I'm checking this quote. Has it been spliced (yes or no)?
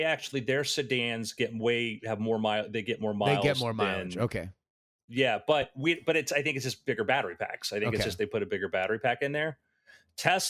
no